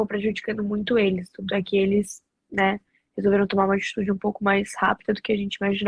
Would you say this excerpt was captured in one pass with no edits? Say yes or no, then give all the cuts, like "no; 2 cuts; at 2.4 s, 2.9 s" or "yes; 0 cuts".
yes; 0 cuts